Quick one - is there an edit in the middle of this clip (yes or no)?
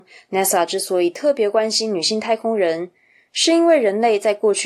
no